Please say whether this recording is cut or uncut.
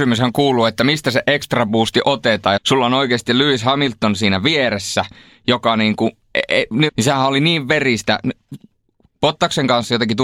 cut